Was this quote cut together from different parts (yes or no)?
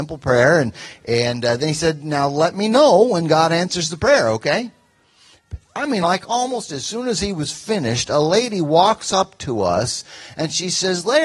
no